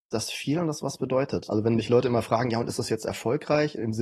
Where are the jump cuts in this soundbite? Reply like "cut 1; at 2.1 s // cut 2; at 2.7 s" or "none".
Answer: cut 1; at 1.5 s